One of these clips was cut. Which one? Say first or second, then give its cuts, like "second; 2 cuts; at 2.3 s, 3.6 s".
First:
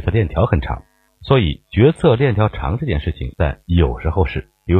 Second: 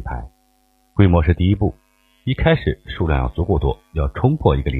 first; 2 cuts; at 1.1 s, 3.3 s